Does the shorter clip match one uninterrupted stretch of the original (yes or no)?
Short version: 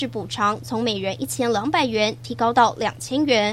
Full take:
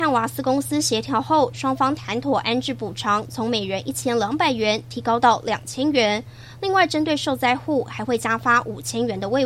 yes